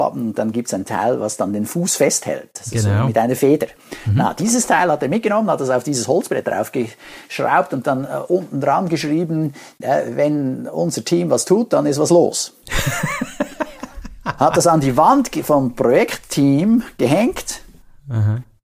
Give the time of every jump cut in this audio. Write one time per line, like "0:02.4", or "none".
none